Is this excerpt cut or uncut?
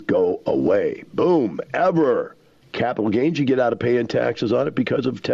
cut